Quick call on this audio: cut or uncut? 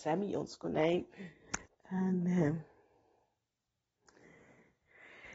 cut